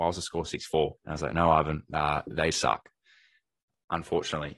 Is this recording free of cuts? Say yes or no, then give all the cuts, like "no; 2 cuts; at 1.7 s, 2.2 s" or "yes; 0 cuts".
no; 2 cuts; at 1.0 s, 2.5 s